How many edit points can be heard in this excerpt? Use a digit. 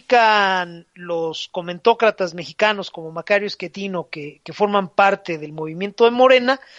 0